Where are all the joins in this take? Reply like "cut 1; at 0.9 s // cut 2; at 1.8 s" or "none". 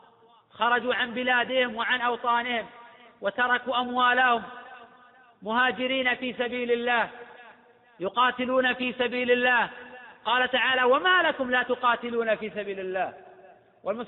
none